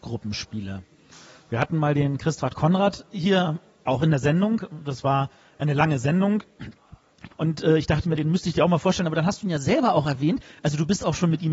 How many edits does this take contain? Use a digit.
1